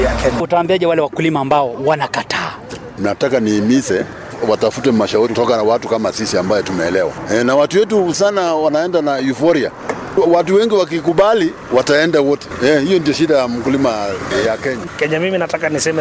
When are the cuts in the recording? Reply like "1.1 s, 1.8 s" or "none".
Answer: 8.1 s